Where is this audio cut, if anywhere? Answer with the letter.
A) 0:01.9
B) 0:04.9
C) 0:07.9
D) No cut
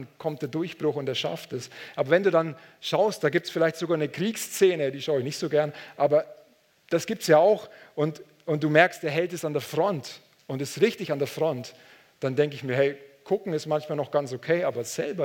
D